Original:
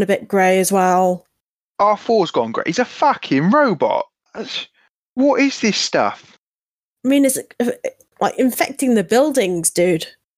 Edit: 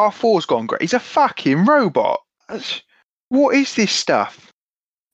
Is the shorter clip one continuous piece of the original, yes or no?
yes